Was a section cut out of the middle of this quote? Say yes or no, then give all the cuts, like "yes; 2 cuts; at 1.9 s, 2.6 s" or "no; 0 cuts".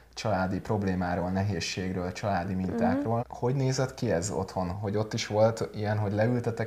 yes; 2 cuts; at 3.2 s, 4.7 s